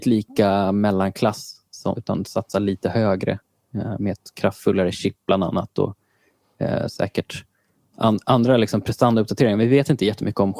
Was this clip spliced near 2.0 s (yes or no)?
yes